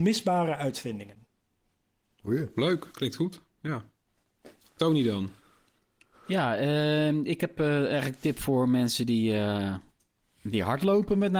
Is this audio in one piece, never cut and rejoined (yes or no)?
yes